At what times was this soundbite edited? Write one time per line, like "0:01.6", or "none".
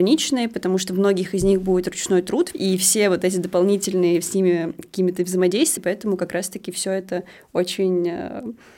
0:02.5
0:05.8